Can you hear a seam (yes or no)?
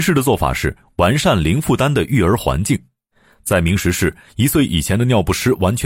no